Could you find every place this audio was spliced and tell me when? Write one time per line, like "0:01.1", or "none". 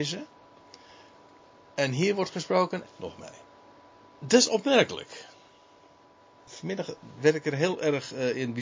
0:02.8